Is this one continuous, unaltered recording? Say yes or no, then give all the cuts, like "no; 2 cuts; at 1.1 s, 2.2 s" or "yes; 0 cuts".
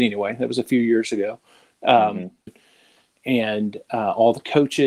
no; 1 cut; at 2.5 s